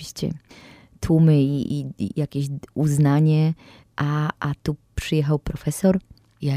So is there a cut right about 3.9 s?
no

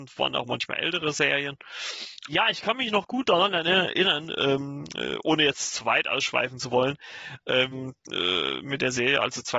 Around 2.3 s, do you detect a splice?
yes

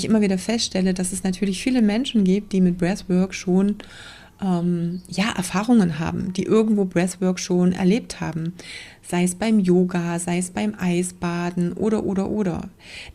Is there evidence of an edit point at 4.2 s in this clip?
no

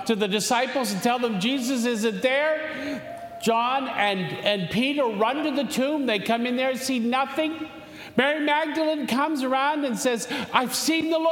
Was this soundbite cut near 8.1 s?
no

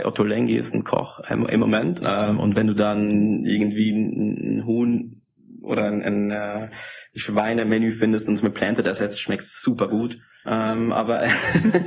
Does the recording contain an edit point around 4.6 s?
no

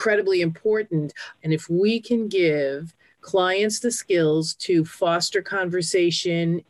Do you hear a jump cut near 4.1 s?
no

